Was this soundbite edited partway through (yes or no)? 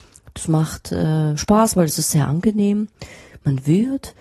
no